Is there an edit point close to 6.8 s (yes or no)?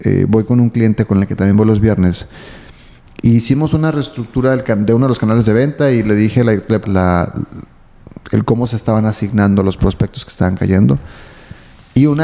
yes